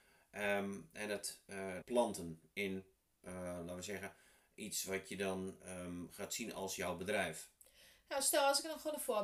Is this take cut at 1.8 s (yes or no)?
yes